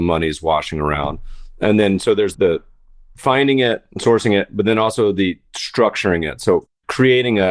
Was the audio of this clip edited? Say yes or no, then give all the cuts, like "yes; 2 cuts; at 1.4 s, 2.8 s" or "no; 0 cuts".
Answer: yes; 1 cut; at 3.9 s